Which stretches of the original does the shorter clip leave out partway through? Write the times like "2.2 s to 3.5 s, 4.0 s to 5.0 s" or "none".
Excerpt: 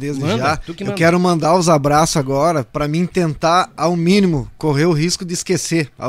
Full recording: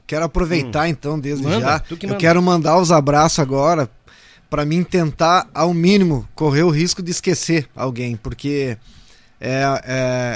3.9 s to 4.5 s